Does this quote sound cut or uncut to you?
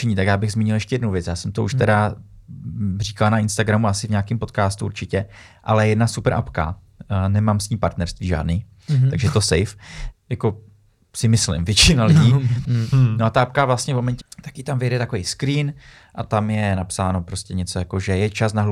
cut